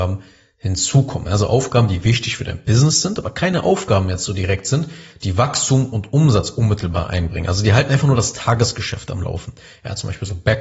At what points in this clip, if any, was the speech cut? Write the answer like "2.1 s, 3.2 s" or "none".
none